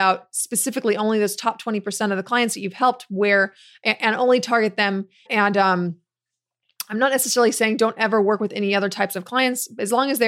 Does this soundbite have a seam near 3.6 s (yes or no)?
no